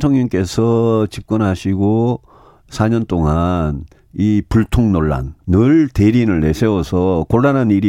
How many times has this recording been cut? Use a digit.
1